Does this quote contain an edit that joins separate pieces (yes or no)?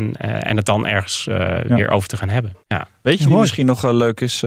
yes